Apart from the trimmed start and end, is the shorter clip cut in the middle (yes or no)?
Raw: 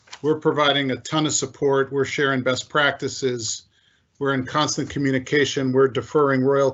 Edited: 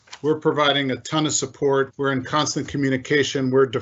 yes